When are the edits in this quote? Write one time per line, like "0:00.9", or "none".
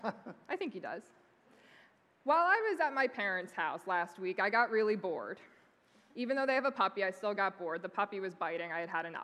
none